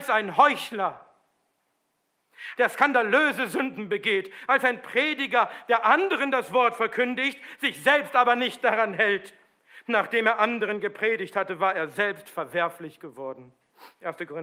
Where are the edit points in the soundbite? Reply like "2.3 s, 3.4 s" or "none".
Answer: 2.5 s